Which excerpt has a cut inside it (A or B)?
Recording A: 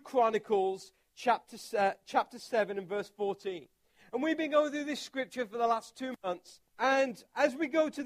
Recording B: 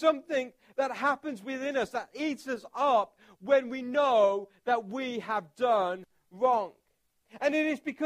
A